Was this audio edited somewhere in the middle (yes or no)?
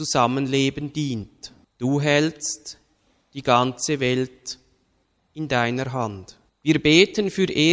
no